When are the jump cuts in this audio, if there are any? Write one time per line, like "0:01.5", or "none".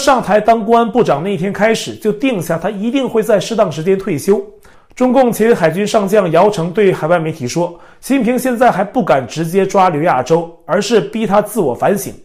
0:04.7